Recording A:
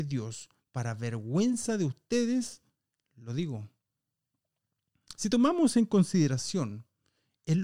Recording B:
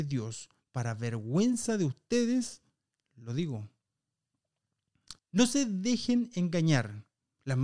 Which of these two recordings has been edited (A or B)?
B